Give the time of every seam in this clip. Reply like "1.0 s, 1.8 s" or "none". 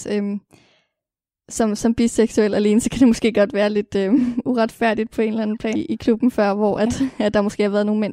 5.7 s